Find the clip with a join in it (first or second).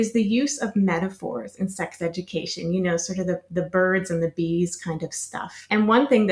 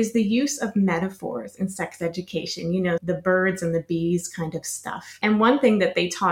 second